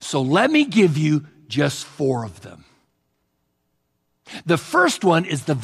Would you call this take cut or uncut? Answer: uncut